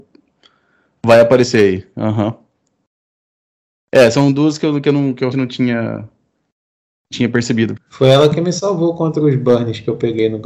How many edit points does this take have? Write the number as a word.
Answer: two